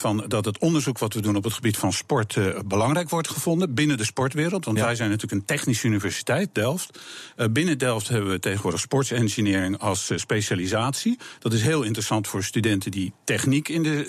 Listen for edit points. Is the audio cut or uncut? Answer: uncut